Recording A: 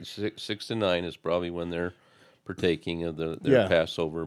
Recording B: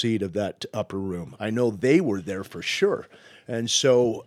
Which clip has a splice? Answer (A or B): B